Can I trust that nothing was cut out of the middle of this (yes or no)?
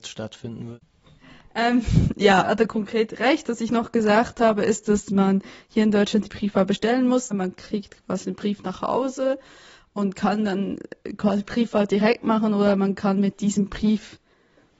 no